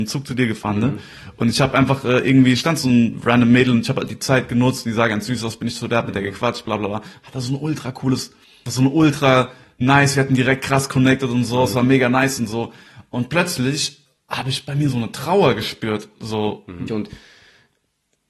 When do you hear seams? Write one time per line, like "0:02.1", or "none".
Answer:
0:08.7
0:16.9